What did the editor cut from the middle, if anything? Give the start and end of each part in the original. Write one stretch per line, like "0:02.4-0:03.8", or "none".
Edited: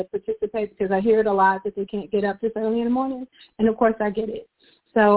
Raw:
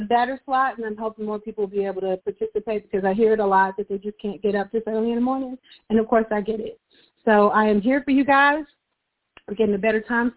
0:04.0-0:04.2